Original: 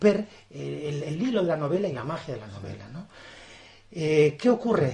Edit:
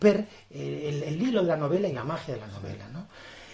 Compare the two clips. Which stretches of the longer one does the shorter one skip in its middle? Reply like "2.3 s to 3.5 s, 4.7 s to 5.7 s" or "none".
none